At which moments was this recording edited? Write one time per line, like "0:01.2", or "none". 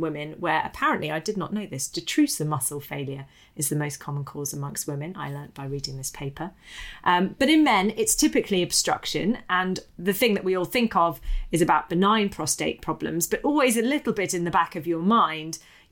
none